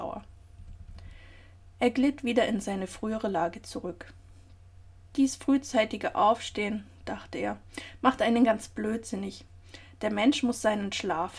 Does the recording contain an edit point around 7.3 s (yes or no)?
no